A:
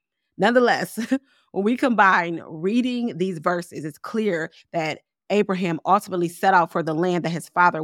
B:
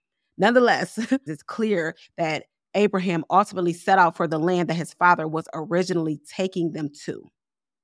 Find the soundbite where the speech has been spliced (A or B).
B